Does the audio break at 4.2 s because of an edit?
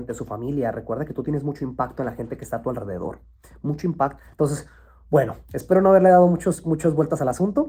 yes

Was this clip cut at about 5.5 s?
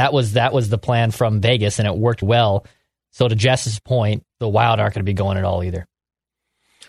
no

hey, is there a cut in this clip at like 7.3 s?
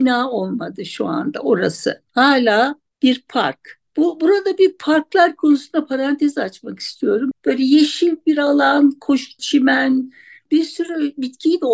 yes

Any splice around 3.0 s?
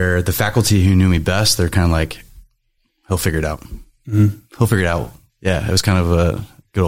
no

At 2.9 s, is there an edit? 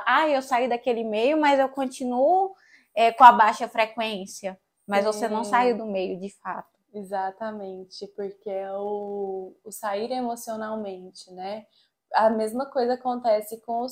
no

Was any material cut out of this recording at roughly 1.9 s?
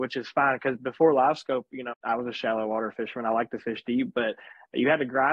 yes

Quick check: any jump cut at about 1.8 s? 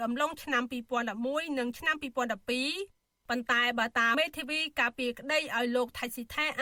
no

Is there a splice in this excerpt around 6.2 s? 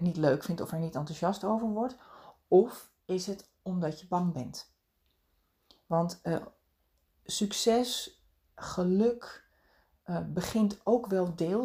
no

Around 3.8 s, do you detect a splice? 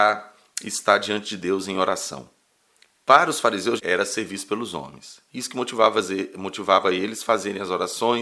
yes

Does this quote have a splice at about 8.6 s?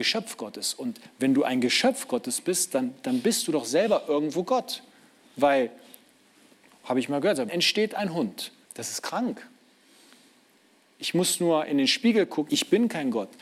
yes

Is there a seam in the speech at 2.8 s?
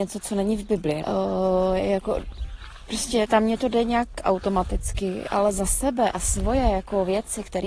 no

